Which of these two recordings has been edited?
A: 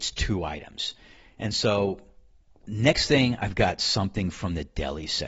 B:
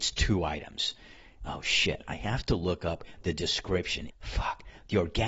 B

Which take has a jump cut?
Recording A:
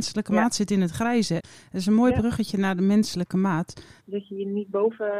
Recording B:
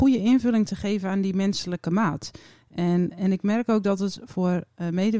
A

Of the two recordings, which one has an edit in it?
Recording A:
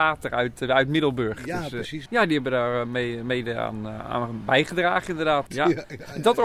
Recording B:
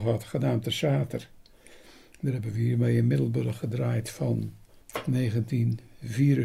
A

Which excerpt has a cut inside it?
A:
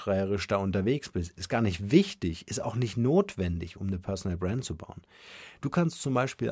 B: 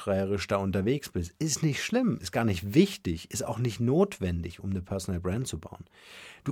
A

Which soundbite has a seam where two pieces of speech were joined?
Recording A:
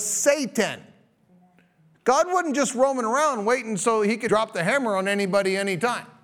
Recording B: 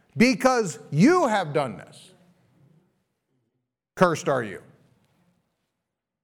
A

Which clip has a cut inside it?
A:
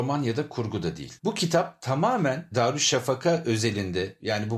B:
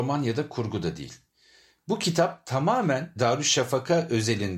A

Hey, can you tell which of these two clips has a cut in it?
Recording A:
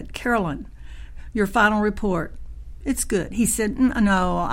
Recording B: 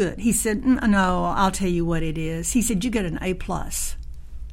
A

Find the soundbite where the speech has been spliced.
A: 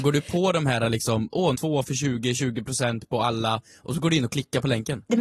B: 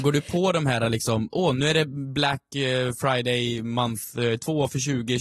A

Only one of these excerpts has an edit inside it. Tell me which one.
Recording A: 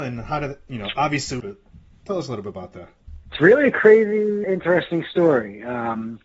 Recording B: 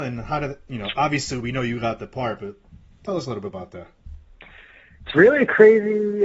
A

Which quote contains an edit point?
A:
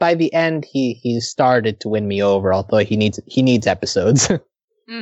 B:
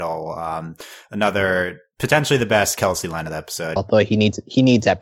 B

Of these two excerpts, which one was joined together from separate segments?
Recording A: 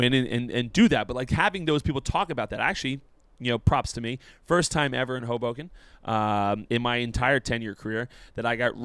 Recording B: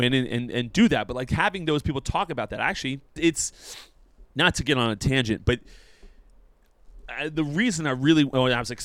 B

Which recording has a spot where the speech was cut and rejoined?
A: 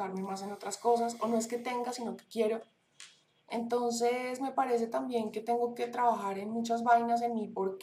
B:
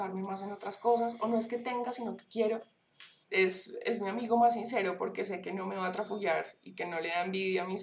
B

